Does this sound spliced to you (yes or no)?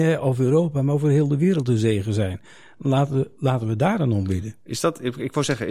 no